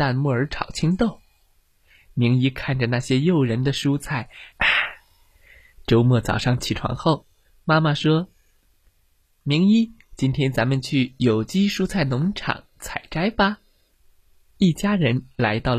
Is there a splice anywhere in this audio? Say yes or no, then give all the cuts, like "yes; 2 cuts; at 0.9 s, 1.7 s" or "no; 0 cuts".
yes; 1 cut; at 4.5 s